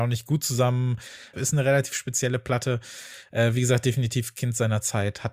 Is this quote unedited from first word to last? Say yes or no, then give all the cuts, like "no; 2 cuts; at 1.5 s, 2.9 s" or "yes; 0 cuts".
no; 1 cut; at 1.3 s